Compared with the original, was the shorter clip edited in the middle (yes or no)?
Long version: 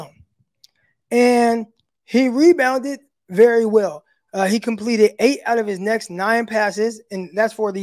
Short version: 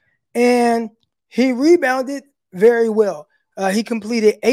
no